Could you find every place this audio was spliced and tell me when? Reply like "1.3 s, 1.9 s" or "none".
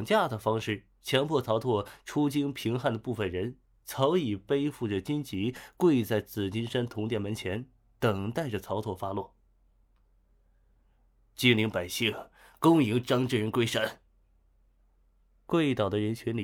none